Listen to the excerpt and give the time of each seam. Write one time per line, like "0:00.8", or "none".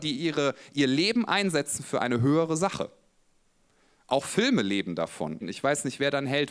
0:05.4